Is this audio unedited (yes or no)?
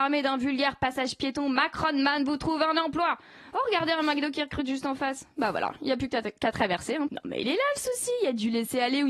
no